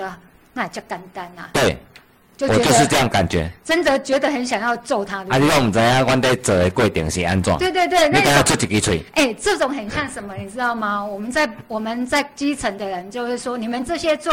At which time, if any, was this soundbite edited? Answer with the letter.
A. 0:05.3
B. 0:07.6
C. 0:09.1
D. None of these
D